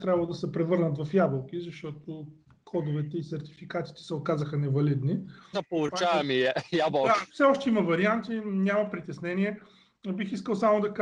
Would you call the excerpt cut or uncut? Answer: cut